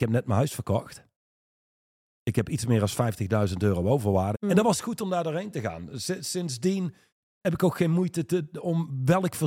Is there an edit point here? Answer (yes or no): yes